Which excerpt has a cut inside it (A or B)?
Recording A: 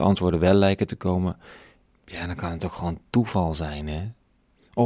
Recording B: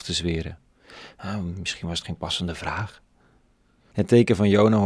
B